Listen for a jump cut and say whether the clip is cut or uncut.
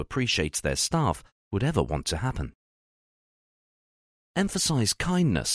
uncut